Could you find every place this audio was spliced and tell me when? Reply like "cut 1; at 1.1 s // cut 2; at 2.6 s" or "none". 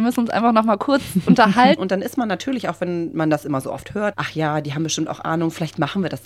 cut 1; at 1.8 s // cut 2; at 4.1 s